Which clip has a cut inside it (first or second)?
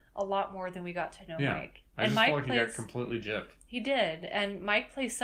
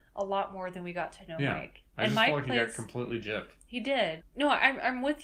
second